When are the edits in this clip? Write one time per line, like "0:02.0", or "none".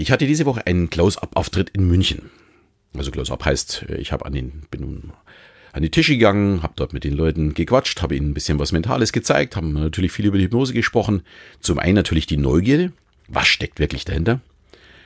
0:11.5

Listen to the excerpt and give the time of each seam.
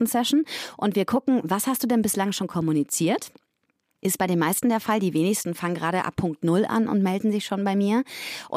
none

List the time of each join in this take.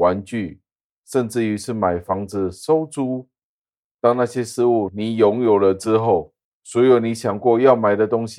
0:03.8
0:06.4

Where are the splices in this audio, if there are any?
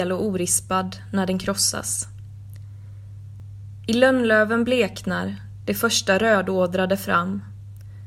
none

